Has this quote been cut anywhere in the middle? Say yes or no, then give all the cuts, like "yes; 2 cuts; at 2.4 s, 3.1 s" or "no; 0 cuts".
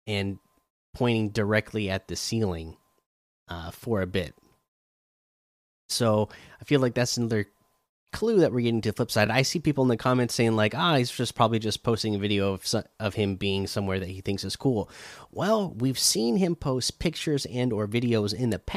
no; 0 cuts